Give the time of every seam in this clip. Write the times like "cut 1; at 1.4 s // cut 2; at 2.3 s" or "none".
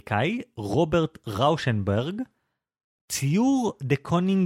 none

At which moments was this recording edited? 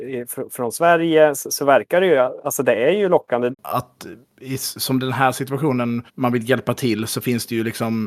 cut 1; at 3.5 s // cut 2; at 6.1 s

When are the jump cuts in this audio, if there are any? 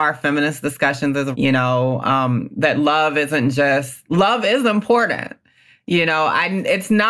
cut 1; at 1.3 s

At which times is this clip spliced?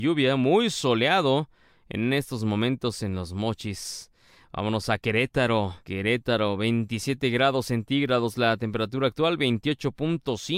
cut 1; at 5.8 s

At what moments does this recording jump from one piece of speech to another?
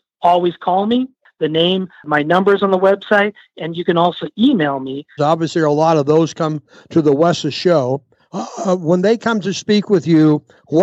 cut 1; at 5.2 s

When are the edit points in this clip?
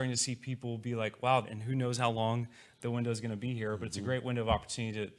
cut 1; at 1.4 s

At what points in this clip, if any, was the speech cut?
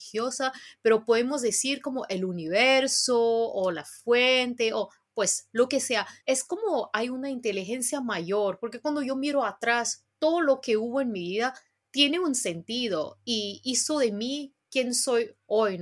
cut 1; at 6.2 s

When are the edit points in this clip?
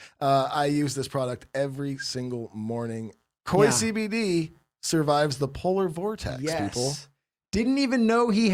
cut 1; at 3.4 s

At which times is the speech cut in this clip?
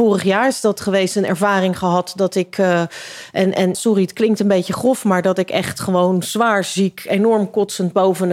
cut 1; at 3.7 s

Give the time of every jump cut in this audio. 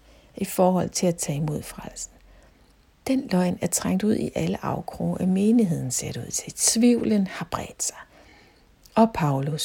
none

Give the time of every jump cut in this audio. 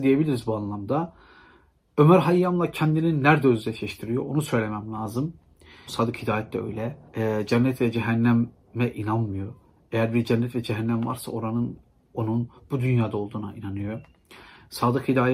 cut 1; at 5.9 s // cut 2; at 7.1 s

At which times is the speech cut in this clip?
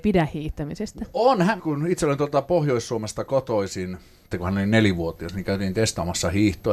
cut 1; at 1.6 s // cut 2; at 4.3 s

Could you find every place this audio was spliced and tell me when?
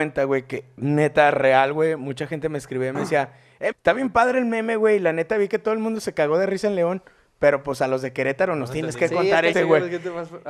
cut 1; at 3.7 s // cut 2; at 9.5 s

